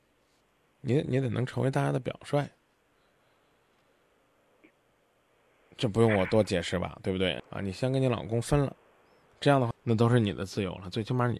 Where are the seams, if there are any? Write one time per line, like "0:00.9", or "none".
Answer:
0:07.4
0:09.7